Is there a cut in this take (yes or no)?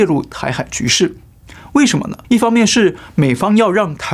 yes